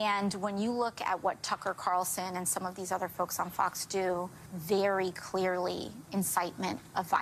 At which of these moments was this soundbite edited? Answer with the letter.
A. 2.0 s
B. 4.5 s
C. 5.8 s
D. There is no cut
B